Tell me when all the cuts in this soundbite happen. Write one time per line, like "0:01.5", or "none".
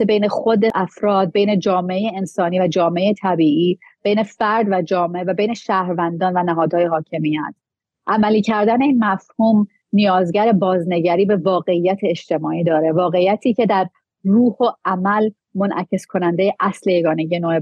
none

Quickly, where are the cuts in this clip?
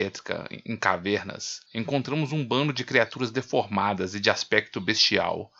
0:01.7

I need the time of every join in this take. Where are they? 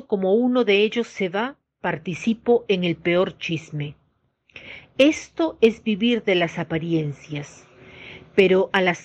none

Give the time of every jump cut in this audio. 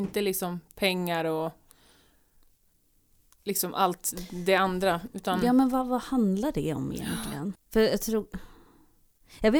0:07.5

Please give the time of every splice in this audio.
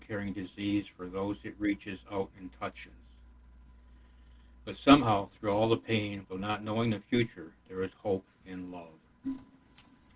0:06.2
0:07.9

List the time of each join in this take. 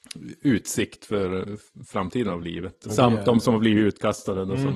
0:02.9

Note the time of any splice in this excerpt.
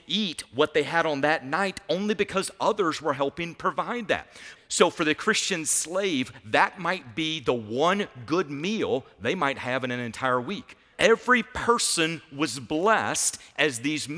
0:04.6
0:10.9

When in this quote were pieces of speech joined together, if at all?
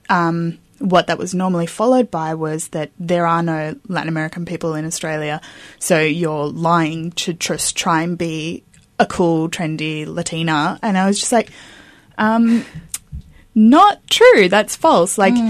0:03.8
0:13.2

